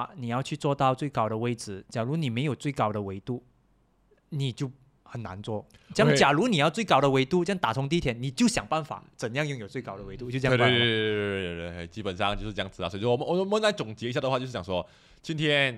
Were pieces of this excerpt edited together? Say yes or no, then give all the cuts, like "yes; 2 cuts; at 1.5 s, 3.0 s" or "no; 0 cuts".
no; 0 cuts